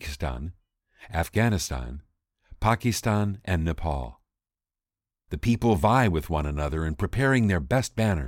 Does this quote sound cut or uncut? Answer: cut